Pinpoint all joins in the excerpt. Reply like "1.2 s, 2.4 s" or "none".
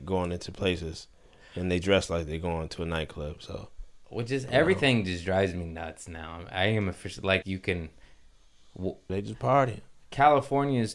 7.4 s, 9.1 s